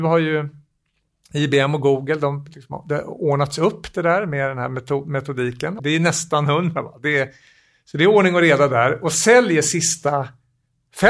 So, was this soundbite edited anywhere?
yes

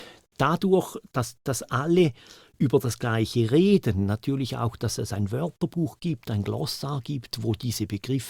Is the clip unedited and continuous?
yes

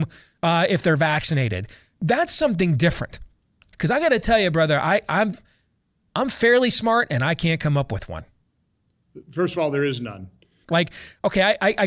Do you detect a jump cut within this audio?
yes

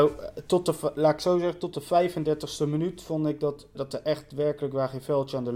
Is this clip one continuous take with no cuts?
no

